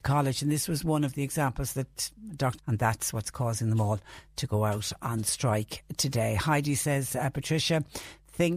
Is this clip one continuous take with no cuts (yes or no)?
no